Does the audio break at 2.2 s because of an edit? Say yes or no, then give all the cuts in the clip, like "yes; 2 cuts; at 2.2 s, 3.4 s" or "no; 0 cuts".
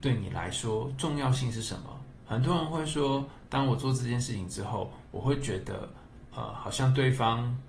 yes; 1 cut; at 2.2 s